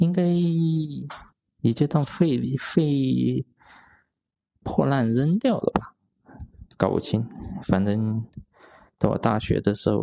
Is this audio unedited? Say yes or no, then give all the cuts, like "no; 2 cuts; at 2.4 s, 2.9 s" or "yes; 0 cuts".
yes; 0 cuts